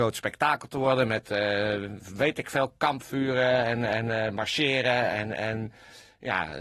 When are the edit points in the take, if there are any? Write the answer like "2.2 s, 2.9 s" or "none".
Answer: none